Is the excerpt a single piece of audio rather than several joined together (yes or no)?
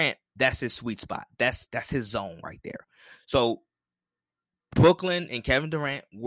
yes